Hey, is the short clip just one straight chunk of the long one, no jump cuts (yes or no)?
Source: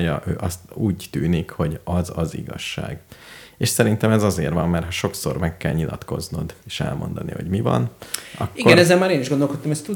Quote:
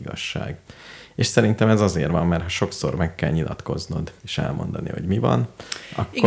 yes